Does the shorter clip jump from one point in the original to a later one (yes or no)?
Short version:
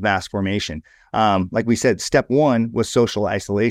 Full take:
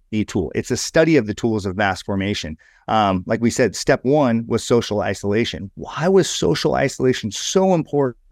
no